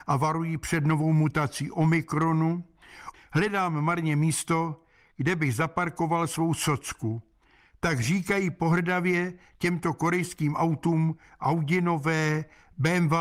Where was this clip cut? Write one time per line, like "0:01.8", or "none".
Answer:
0:03.1